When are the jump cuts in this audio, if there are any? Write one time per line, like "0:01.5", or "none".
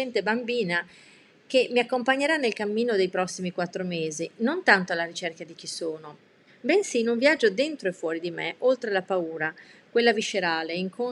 0:06.5